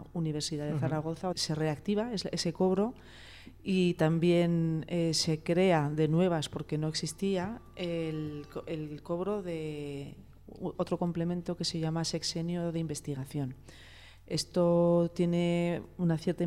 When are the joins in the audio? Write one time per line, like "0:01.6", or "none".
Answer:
0:01.3